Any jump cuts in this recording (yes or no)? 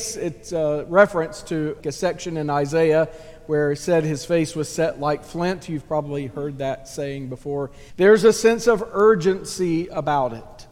yes